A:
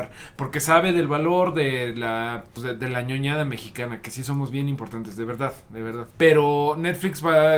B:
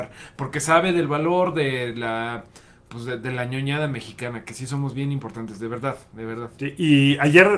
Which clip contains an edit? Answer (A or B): A